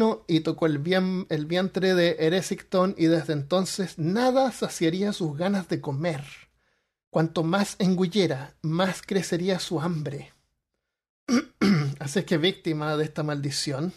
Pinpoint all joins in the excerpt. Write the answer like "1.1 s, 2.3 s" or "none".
none